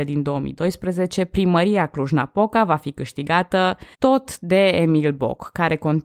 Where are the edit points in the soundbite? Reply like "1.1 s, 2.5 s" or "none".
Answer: 3.9 s